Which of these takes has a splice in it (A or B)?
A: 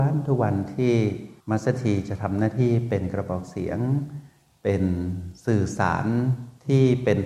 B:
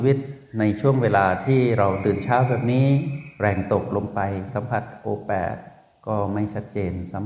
A